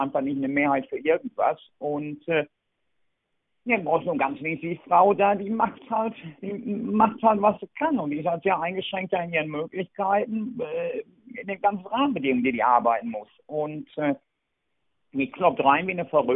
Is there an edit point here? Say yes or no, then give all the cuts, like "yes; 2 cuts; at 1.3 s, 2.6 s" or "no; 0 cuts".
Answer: no; 0 cuts